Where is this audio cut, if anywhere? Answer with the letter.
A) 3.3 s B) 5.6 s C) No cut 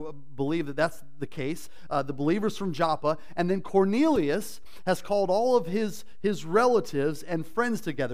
C